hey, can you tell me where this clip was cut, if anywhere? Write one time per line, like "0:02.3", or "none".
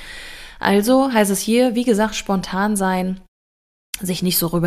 none